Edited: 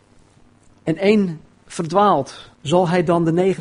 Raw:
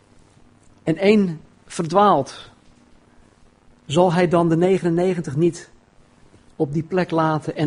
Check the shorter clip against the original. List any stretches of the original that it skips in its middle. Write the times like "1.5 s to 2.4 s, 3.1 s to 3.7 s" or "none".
2.5 s to 3.8 s

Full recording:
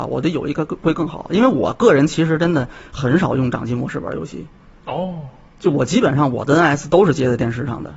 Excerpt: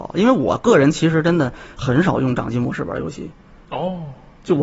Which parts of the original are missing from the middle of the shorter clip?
none

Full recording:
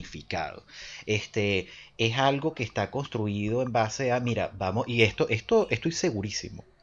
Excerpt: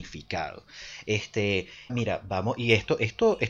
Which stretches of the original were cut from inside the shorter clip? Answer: 1.9 s to 4.2 s

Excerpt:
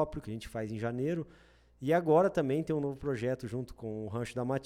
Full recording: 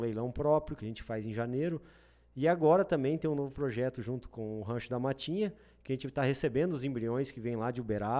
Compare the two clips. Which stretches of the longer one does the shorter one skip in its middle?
none

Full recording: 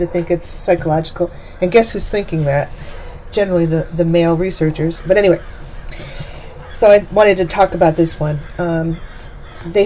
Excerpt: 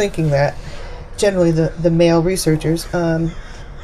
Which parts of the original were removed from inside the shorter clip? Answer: 5.0 s to 8.5 s

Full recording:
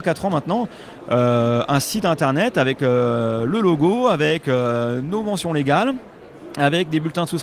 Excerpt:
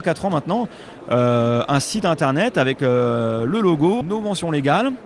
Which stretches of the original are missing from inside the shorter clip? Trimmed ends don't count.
4.0 s to 5.0 s

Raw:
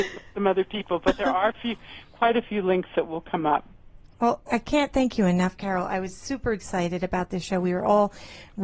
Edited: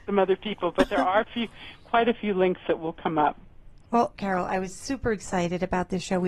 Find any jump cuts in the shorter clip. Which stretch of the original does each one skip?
4.4 s to 5.6 s

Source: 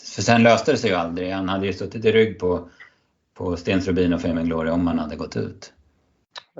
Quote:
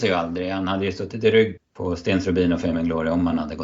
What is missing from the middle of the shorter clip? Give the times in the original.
2.4 s to 3.2 s

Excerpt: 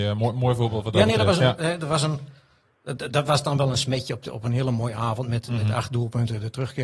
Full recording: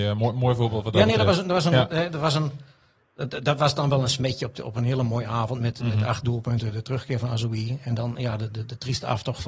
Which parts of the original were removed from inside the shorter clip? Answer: 1.4 s to 1.7 s

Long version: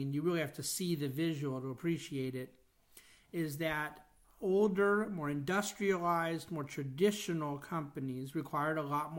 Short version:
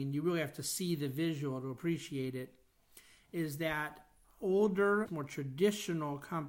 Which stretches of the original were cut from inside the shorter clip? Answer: 5.1 s to 6.5 s

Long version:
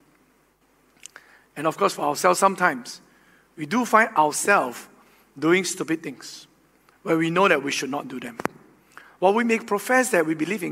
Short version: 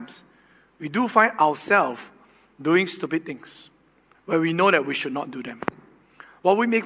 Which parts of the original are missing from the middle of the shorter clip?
none

